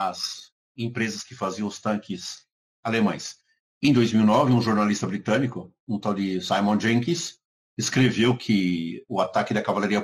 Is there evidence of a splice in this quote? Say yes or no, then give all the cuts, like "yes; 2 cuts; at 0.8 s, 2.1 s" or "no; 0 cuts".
no; 0 cuts